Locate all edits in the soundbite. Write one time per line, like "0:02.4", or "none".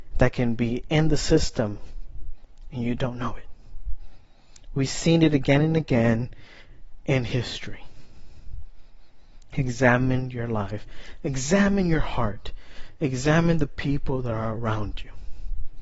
0:09.5